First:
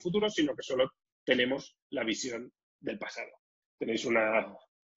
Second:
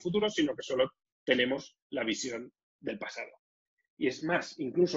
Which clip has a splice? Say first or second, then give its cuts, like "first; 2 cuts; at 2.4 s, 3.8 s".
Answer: first; 1 cut; at 3.6 s